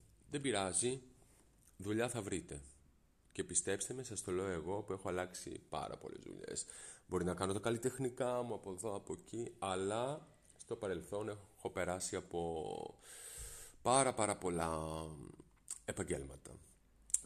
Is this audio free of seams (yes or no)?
yes